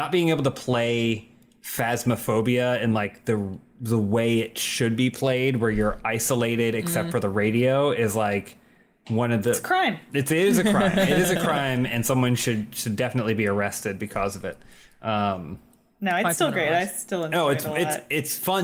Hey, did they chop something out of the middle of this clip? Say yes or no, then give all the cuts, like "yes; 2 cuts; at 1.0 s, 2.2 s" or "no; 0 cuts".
no; 0 cuts